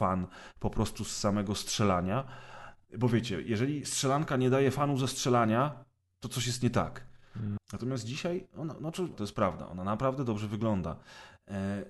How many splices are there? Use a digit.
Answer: 2